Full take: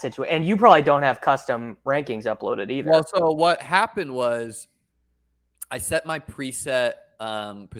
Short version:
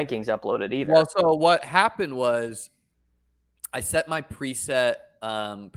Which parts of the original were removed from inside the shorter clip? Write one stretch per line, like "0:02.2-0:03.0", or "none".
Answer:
none